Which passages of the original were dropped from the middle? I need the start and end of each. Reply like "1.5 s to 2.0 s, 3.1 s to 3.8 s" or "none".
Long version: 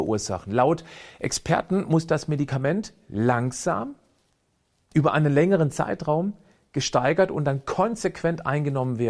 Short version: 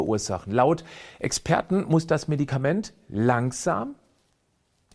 none